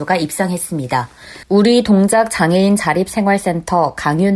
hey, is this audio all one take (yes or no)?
no